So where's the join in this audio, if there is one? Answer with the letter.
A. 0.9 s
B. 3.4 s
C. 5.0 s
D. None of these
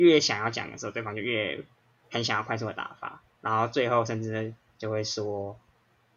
D